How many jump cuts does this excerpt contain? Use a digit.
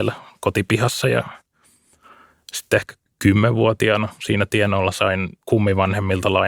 1